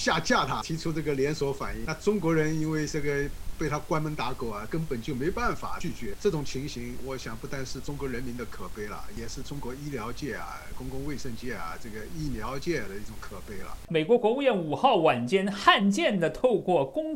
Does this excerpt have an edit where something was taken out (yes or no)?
no